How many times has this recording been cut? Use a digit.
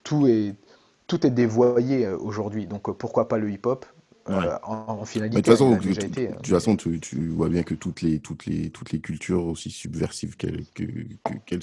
0